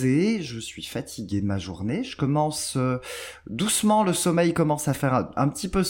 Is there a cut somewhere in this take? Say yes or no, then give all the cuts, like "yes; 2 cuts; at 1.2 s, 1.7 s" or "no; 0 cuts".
no; 0 cuts